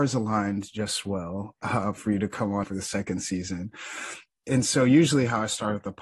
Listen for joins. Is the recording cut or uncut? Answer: cut